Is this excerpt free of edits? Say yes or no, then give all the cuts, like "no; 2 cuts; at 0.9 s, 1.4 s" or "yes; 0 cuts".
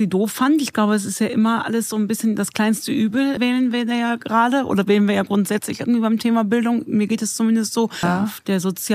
no; 2 cuts; at 3.4 s, 8.0 s